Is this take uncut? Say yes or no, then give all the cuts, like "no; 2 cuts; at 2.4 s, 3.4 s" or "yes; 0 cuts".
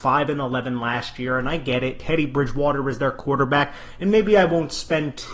yes; 0 cuts